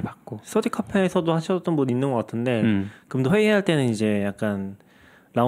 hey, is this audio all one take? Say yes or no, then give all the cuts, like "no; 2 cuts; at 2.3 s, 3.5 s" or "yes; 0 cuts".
yes; 0 cuts